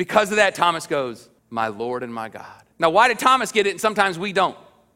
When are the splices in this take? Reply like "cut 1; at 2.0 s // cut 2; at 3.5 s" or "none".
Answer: cut 1; at 1.4 s // cut 2; at 2.7 s